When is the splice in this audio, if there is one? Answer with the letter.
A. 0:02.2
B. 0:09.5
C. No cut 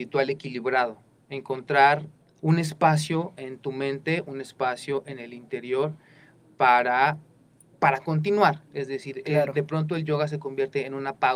A